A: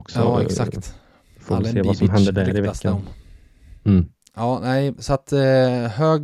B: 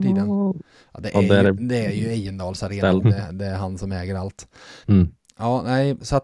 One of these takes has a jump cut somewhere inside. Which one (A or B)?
B